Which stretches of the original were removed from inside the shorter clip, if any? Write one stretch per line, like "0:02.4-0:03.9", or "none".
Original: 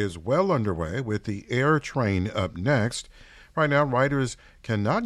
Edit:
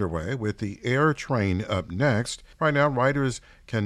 0:03.2-0:03.5